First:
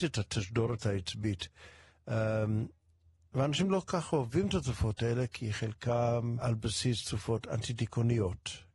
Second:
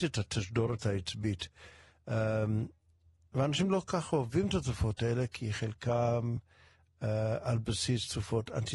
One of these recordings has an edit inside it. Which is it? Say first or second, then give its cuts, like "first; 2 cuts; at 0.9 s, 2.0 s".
first; 1 cut; at 6.4 s